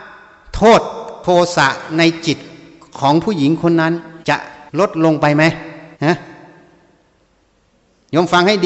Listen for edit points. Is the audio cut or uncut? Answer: cut